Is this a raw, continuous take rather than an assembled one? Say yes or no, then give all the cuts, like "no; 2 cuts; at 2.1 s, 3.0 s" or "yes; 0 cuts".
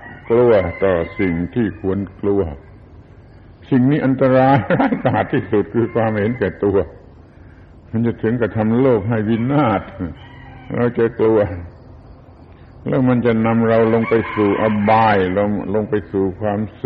yes; 0 cuts